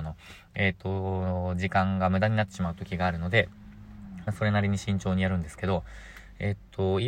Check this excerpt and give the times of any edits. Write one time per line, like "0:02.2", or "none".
none